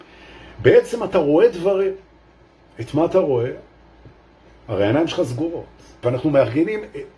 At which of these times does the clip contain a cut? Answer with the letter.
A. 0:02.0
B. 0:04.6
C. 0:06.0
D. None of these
C